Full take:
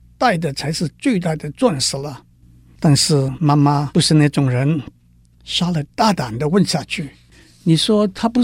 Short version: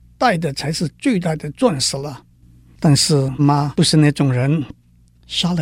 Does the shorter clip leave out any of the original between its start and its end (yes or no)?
yes